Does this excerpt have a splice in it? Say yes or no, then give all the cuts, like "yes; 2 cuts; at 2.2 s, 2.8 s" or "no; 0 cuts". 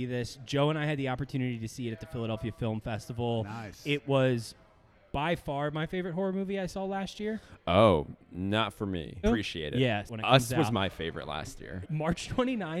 yes; 2 cuts; at 9.2 s, 11.8 s